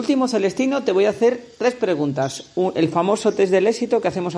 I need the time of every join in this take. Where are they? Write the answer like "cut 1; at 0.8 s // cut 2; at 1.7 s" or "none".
none